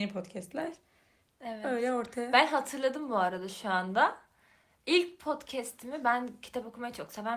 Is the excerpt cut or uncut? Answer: uncut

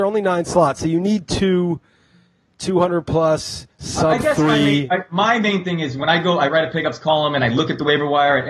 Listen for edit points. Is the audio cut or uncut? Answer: uncut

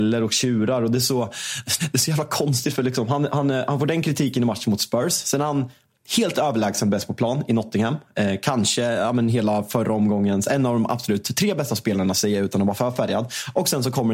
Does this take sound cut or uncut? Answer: cut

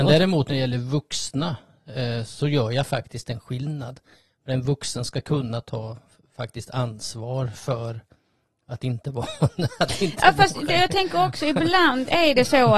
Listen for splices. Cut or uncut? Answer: uncut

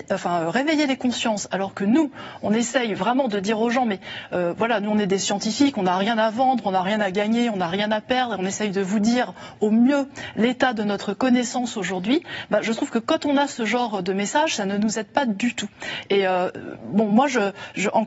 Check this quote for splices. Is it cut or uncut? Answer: uncut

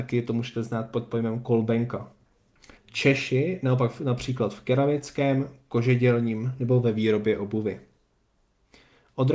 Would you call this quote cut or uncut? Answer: cut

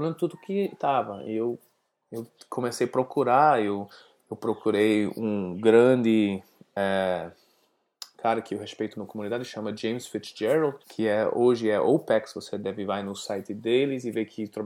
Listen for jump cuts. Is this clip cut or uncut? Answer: cut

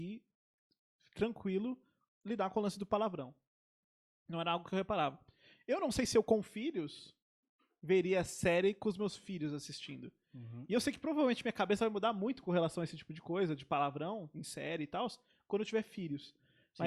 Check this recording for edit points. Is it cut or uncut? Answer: uncut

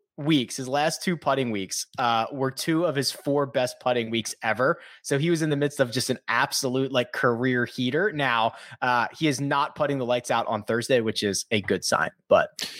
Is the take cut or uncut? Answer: uncut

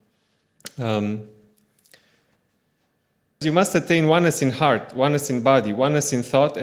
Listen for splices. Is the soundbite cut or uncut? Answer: cut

